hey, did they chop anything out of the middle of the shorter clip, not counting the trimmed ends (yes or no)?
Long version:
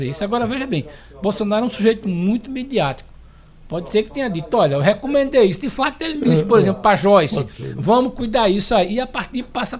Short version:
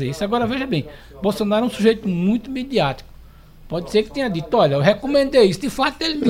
no